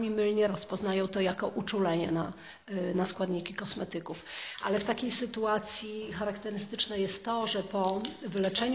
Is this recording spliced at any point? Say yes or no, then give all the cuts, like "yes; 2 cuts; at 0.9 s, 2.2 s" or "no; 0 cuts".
no; 0 cuts